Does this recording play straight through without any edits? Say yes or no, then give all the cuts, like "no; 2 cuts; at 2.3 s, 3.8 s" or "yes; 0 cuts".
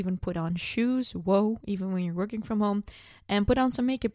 yes; 0 cuts